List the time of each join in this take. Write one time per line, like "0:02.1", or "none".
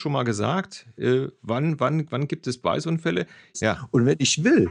0:03.5